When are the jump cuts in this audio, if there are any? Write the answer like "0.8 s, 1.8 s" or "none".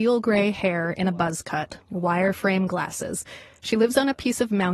none